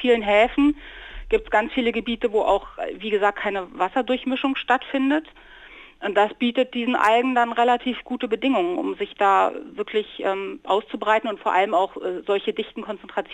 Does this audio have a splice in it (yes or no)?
no